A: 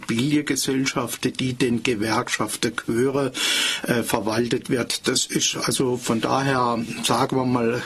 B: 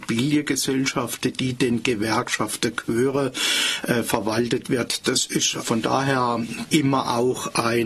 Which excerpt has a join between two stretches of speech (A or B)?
B